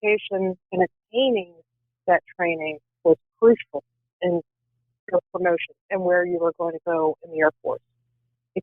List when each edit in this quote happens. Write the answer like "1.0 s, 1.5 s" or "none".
5.8 s